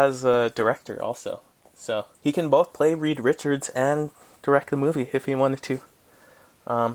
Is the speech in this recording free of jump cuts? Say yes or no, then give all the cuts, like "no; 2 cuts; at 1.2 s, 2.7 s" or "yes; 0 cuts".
no; 1 cut; at 2.1 s